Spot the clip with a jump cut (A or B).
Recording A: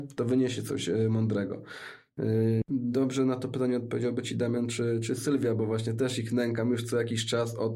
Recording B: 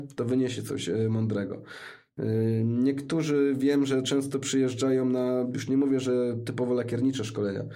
A